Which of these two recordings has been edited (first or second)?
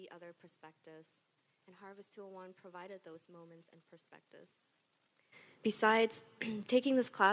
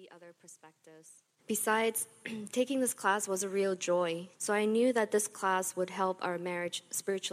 second